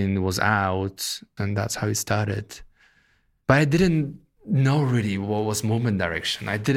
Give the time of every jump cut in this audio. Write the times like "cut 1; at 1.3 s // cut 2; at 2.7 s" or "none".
cut 1; at 1.4 s